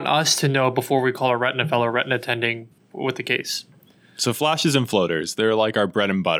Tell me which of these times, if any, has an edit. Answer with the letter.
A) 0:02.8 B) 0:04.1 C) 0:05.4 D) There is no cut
A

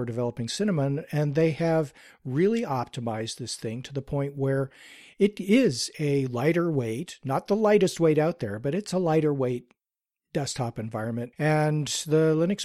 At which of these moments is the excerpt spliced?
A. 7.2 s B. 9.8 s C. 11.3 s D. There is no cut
C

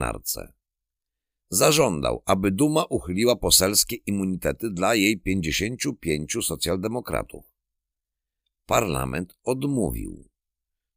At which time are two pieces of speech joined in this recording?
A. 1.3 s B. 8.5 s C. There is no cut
C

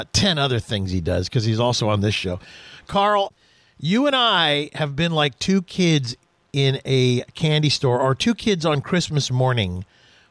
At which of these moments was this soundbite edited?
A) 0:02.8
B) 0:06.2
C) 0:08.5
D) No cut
D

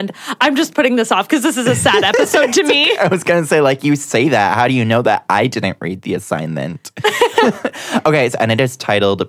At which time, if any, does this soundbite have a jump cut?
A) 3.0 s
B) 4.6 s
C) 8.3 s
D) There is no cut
C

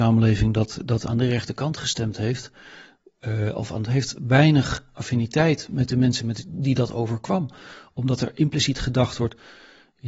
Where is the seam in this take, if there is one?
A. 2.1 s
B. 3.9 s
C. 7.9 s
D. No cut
B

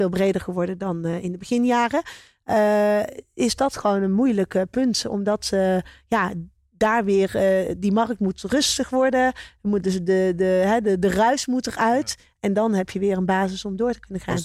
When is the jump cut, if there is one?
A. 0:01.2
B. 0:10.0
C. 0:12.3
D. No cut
D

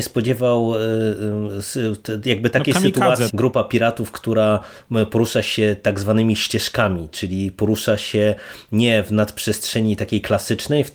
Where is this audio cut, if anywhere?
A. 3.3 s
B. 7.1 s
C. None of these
A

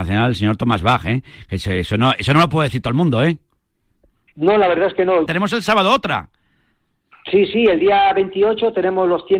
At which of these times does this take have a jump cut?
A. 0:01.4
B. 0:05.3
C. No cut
B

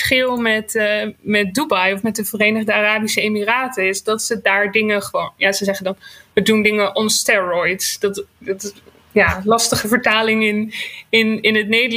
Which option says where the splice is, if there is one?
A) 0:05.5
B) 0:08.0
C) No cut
C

